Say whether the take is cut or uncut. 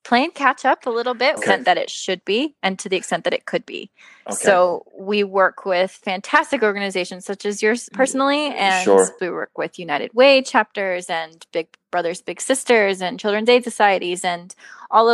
cut